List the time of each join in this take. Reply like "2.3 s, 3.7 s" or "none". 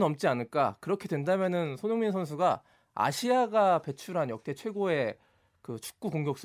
none